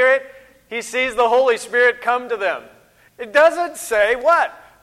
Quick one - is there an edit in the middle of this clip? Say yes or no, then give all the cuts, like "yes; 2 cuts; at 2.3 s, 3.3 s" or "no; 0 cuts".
no; 0 cuts